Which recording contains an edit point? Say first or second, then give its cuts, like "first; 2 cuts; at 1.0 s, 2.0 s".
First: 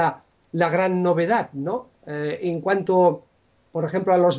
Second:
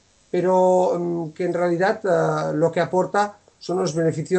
first; 1 cut; at 1.9 s